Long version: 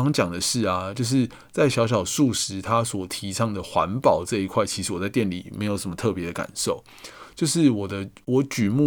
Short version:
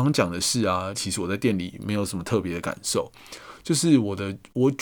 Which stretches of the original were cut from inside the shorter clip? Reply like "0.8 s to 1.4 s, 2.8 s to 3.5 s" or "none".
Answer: 0.9 s to 4.7 s